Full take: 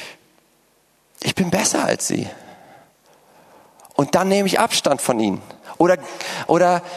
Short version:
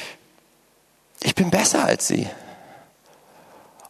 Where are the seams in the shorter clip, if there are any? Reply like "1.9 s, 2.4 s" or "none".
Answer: none